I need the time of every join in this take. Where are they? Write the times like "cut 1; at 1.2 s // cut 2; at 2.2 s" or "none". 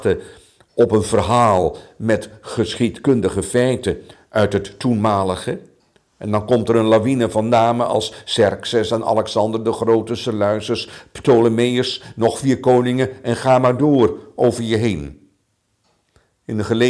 none